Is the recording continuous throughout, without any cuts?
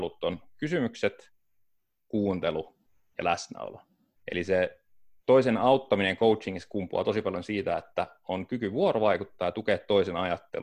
no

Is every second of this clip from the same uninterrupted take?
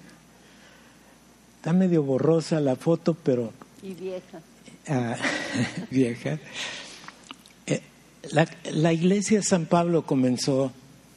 no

